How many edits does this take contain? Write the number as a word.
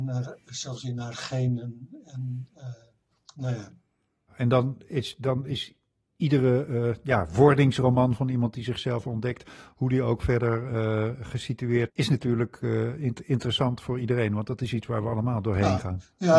one